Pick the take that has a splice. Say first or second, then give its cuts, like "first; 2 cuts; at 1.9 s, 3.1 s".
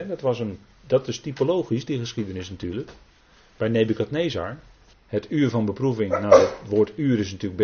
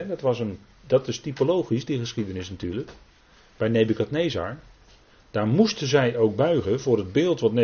first; 1 cut; at 4.9 s